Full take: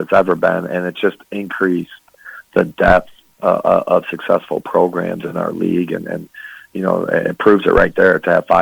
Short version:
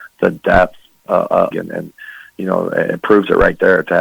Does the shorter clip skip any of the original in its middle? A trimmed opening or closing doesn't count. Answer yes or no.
yes